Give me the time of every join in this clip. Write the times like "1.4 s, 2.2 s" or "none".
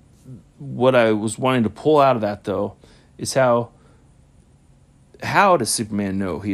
none

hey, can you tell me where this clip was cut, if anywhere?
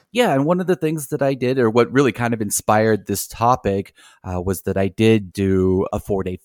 5.3 s

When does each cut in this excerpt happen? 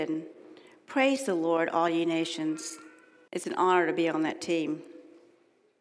3.3 s

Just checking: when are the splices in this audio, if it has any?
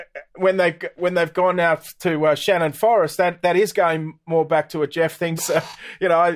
5.4 s

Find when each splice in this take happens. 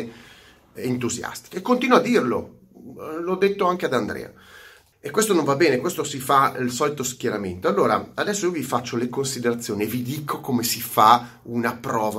4.9 s

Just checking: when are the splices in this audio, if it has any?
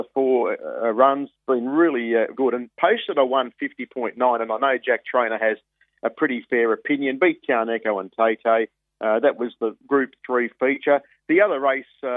2.3 s

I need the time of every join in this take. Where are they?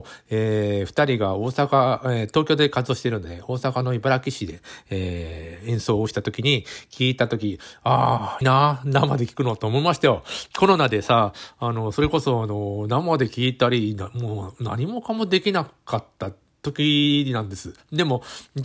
8.4 s

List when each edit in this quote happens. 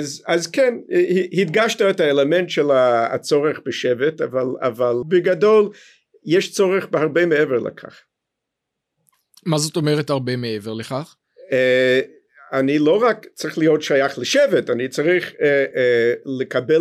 5.0 s, 15.7 s

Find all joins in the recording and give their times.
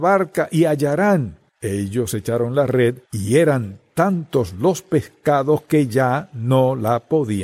1.5 s, 3.1 s

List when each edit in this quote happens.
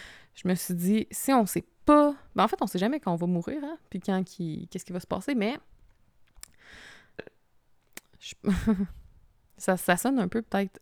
7.2 s

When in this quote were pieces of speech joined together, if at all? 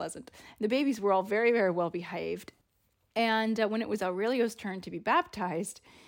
none

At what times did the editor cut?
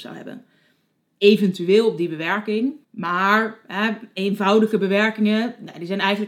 2.8 s

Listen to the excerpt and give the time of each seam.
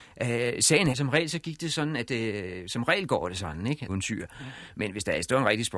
0.9 s, 3.9 s

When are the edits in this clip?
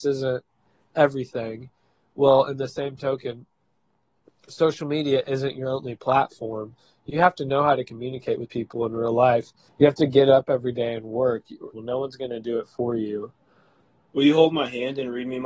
9.7 s, 11.7 s

